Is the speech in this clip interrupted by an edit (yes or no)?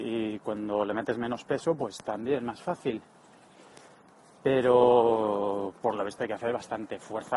no